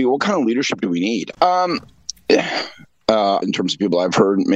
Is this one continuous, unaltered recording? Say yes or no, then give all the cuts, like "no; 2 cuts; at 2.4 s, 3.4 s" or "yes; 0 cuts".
no; 2 cuts; at 1.3 s, 3.4 s